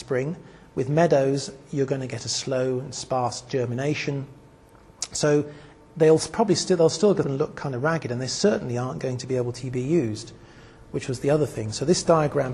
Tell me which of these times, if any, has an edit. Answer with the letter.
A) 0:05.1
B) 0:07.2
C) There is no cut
B